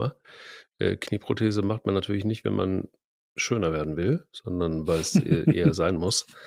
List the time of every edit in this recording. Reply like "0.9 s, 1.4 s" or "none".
none